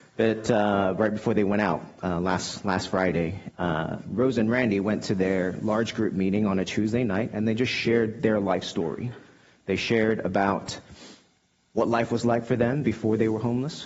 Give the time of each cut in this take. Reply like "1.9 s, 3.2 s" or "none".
3.5 s